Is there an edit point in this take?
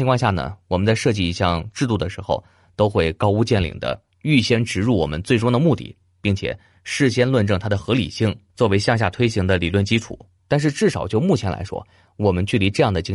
yes; 1 cut; at 10.4 s

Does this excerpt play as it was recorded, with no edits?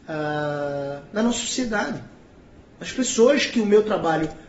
yes; 0 cuts

